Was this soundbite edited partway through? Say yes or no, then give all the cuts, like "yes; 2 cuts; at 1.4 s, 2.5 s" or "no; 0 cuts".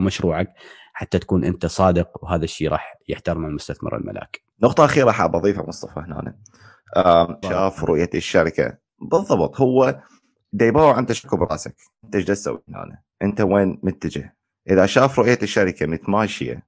yes; 1 cut; at 7.4 s